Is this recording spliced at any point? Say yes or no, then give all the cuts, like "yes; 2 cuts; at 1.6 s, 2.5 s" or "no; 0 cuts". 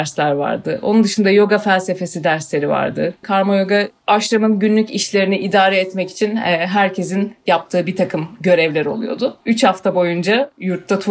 yes; 2 cuts; at 3.2 s, 9.4 s